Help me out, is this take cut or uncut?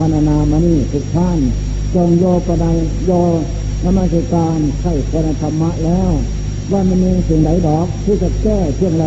uncut